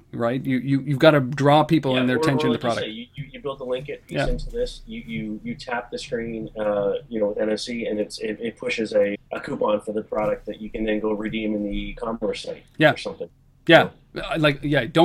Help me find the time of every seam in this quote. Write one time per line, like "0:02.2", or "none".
0:09.1

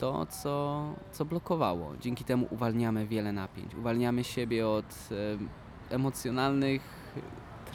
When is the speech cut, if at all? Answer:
none

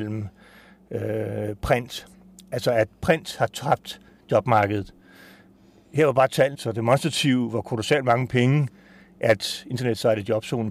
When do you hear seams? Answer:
0:06.5

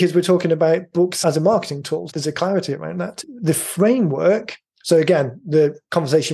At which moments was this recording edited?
0:02.1

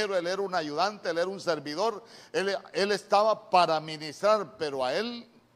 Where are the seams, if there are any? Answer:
none

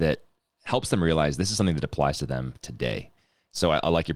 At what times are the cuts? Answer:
none

